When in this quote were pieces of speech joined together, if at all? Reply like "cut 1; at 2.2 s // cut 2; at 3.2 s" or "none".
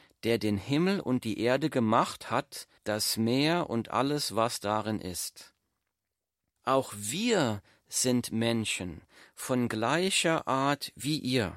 cut 1; at 2.8 s // cut 2; at 6.6 s